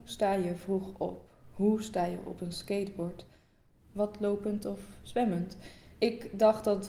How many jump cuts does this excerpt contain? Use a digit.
1